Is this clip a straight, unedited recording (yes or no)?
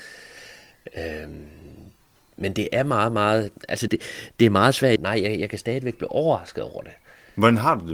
no